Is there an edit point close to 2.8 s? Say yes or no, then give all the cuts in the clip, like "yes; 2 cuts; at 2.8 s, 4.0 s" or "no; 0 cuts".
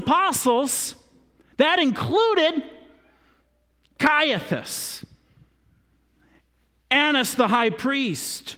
no; 0 cuts